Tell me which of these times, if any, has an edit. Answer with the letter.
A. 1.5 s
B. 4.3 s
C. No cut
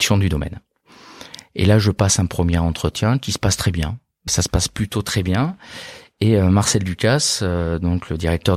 B